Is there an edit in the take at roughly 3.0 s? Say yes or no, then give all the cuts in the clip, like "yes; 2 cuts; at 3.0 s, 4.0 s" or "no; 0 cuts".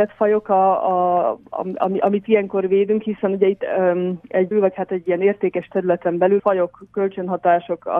no; 2 cuts; at 4.5 s, 6.4 s